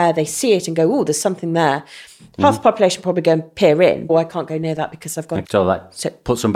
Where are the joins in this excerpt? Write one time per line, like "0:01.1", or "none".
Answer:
0:04.1
0:05.4